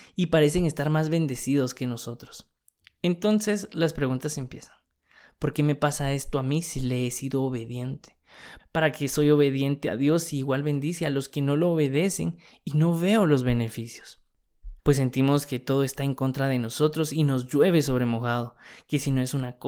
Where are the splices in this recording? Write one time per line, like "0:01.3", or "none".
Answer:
0:08.6
0:14.8